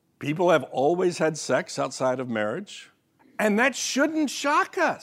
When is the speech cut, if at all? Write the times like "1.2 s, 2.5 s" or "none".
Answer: 3.2 s